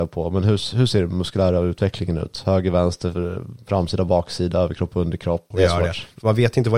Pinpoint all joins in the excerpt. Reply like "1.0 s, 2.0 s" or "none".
5.5 s